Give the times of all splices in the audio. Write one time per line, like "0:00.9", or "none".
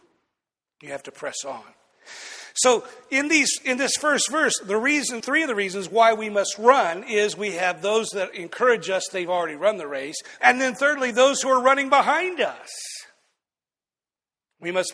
0:05.2
0:10.4